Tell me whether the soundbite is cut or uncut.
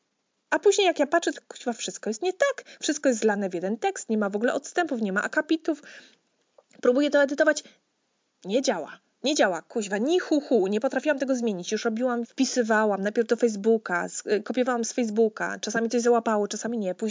cut